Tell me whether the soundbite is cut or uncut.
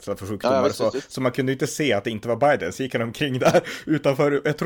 uncut